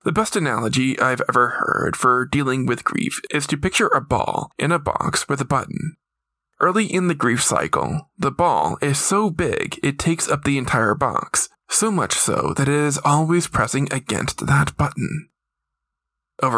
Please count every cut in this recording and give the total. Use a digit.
0